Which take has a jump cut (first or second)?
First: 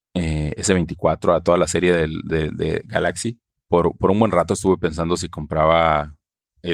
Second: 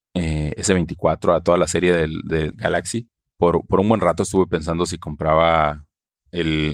second